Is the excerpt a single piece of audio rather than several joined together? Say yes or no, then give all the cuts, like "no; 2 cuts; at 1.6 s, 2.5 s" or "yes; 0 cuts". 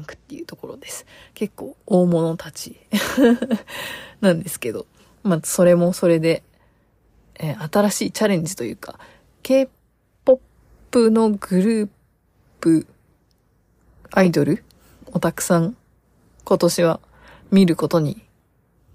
yes; 0 cuts